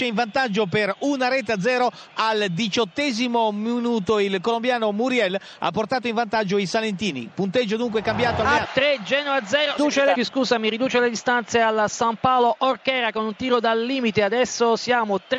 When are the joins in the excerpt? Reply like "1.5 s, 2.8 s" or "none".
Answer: 8.6 s, 10.1 s